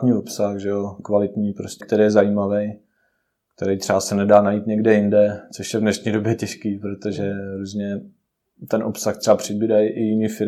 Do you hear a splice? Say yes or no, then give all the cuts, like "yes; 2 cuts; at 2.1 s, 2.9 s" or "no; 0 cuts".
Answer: yes; 1 cut; at 1.8 s